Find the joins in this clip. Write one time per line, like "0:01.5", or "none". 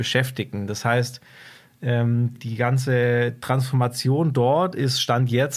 0:02.3